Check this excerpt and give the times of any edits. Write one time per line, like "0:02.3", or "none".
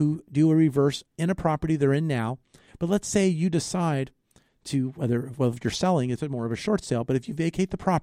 0:02.7